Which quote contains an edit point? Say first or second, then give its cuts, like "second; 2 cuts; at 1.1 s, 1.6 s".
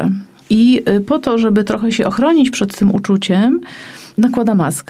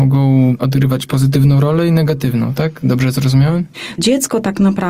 second; 1 cut; at 4.0 s